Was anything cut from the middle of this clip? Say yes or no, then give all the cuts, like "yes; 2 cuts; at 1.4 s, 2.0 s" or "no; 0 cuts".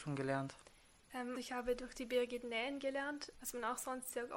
yes; 2 cuts; at 1.4 s, 3.3 s